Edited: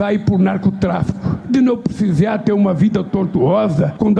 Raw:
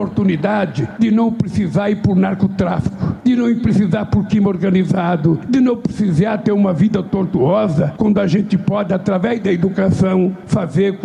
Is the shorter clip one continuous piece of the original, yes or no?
no